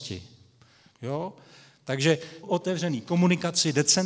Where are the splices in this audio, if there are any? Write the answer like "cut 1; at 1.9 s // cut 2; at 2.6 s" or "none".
cut 1; at 0.9 s // cut 2; at 2.4 s